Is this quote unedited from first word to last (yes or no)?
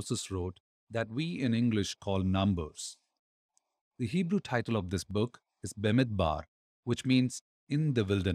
yes